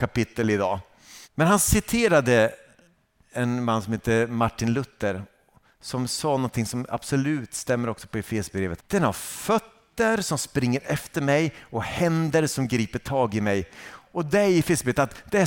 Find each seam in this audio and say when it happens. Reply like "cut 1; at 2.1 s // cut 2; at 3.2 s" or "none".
cut 1; at 1.2 s // cut 2; at 8.8 s